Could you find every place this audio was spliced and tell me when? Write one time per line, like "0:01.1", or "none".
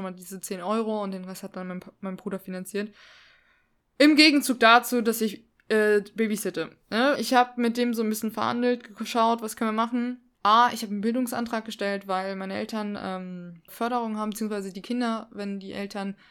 0:07.2
0:10.3
0:13.7

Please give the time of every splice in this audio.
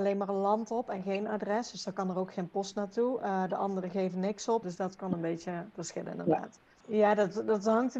0:04.6
0:06.8

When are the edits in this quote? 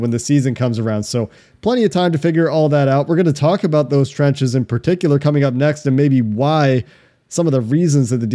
none

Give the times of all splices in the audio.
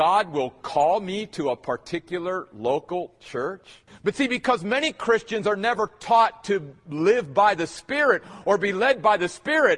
0:03.9

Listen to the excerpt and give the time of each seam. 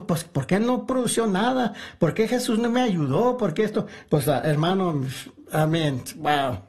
none

